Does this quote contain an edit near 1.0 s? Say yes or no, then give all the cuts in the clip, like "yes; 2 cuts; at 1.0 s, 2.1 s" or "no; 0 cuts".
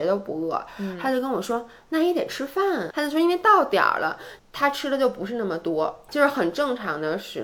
no; 3 cuts; at 2.9 s, 4.4 s, 6.1 s